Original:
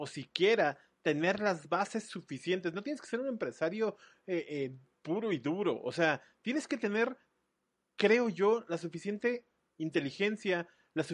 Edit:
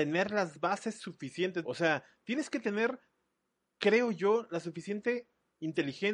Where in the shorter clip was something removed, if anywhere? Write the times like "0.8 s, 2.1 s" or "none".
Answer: 1.6 s